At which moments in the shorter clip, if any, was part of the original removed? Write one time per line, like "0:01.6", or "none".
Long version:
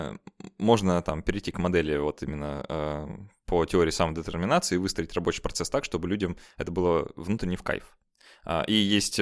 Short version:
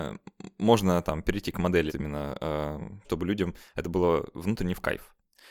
0:01.9
0:03.0